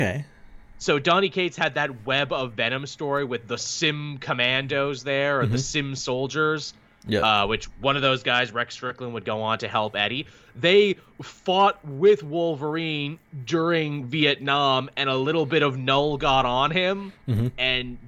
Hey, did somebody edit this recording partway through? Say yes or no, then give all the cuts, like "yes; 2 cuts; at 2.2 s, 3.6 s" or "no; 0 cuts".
no; 0 cuts